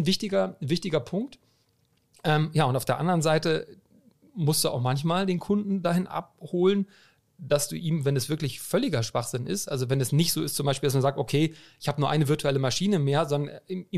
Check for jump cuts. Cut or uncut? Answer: uncut